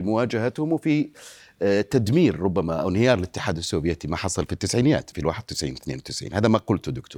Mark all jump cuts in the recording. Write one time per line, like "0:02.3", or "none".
0:05.1